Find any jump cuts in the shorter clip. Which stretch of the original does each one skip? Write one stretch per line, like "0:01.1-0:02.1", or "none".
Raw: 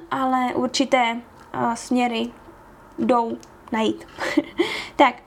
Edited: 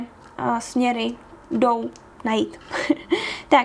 0:02.6-0:02.9